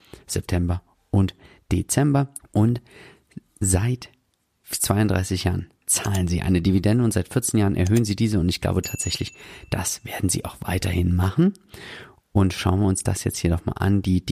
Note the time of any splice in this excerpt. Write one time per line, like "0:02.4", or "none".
0:02.4